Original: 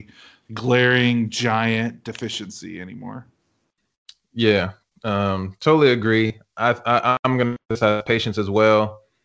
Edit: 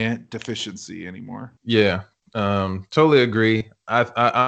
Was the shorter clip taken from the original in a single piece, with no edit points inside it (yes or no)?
no